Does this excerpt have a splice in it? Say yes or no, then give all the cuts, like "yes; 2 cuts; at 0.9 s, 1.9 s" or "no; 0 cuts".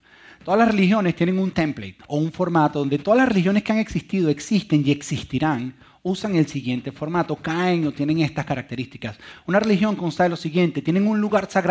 no; 0 cuts